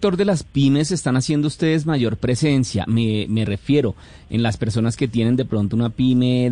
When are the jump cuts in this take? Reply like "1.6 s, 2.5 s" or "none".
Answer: none